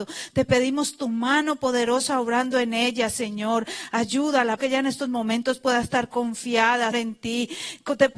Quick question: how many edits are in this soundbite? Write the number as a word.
two